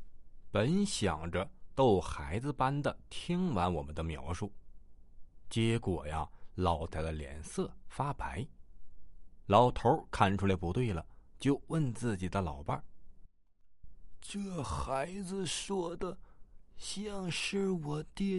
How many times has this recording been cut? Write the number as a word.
one